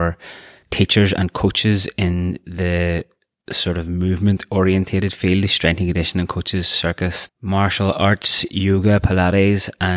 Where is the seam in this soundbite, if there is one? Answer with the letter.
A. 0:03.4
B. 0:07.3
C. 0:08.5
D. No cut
B